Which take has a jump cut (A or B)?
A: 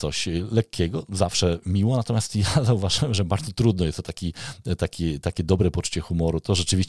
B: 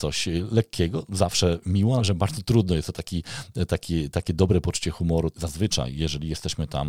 B